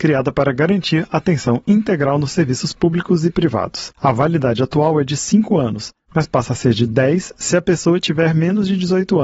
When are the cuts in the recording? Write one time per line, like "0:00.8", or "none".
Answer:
none